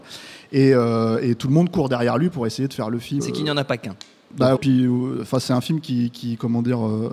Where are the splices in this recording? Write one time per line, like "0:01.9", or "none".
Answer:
0:03.2
0:04.6